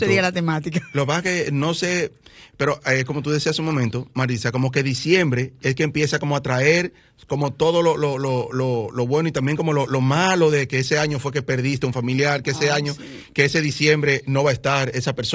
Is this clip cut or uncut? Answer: uncut